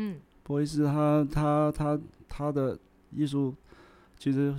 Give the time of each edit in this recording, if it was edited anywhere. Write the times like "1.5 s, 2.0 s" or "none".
none